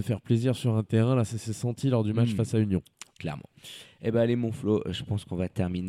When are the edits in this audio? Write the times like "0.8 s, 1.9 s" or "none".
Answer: none

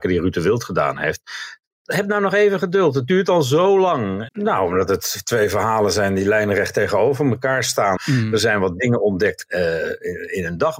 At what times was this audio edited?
4.3 s, 8.0 s, 9.5 s

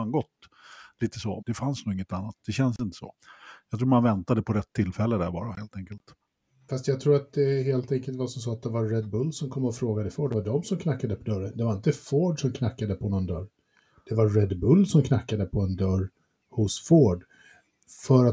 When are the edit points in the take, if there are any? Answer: 1.4 s

